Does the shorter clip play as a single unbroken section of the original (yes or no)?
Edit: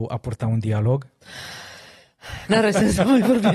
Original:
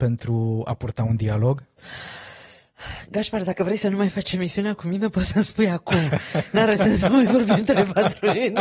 no